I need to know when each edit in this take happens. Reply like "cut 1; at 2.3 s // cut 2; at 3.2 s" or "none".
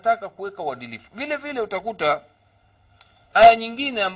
none

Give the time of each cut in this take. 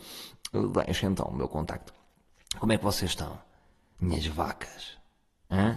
none

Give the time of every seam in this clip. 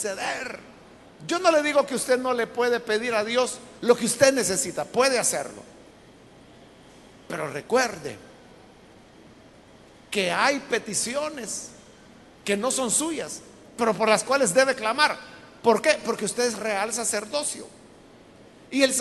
cut 1; at 1.1 s

